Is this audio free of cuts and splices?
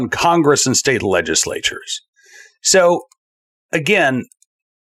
yes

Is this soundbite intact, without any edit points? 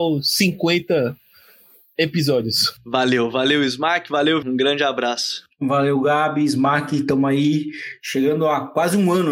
no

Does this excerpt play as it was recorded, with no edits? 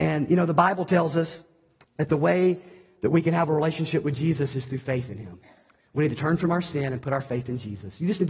yes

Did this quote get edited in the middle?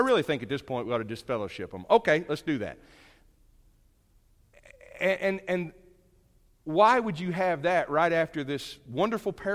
no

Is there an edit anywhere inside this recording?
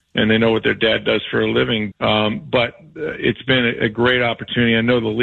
yes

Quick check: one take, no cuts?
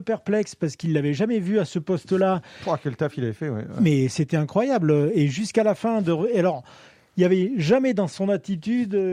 yes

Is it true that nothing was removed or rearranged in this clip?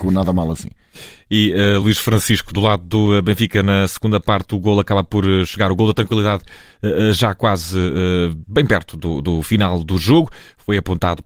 yes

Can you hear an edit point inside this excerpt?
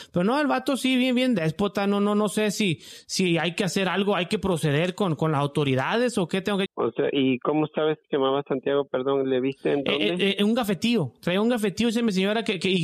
yes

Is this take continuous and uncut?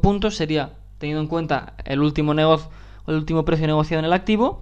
yes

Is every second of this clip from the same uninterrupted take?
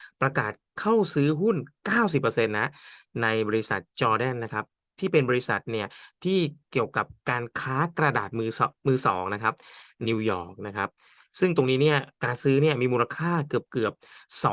no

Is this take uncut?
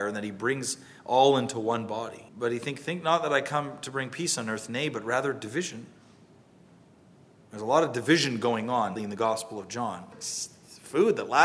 no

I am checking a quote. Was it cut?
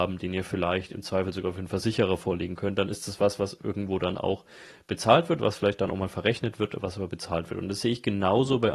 no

